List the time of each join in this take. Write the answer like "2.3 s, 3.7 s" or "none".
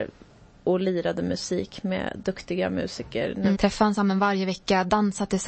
3.5 s